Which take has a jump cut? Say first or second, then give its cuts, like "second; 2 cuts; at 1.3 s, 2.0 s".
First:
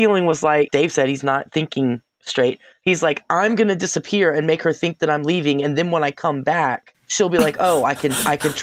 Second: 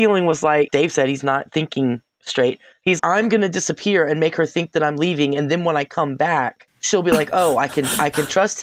second; 1 cut; at 3.0 s